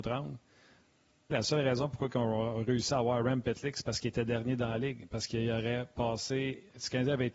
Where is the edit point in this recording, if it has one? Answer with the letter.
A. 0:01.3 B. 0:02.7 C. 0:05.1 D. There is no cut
A